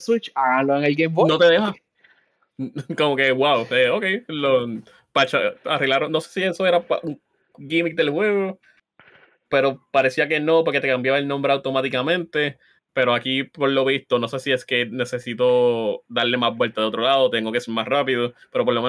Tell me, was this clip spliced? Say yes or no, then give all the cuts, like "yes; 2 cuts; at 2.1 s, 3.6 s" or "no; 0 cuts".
no; 0 cuts